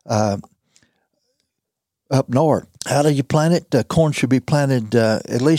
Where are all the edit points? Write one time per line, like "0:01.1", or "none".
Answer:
0:02.8